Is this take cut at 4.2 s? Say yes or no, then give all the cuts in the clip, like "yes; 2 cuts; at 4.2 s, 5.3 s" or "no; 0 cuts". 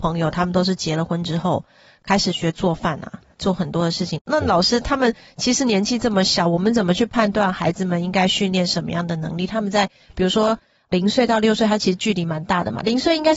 yes; 1 cut; at 4.2 s